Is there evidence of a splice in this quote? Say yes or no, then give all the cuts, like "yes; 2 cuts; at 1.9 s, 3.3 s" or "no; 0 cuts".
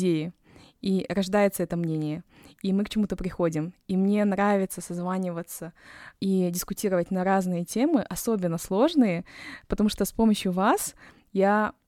yes; 1 cut; at 6.1 s